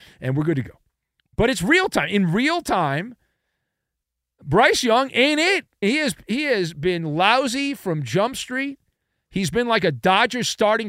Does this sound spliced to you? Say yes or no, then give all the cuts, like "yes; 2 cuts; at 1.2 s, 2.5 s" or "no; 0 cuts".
yes; 1 cut; at 5.8 s